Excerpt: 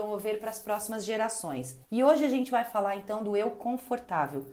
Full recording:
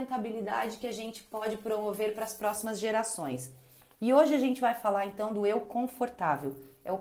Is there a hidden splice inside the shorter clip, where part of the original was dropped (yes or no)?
yes